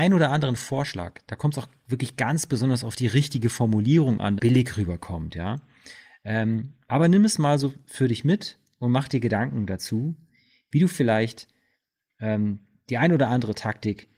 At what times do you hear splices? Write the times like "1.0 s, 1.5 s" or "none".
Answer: 4.4 s